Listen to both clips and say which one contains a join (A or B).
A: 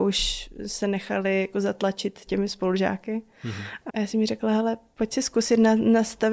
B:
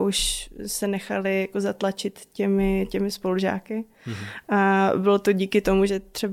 A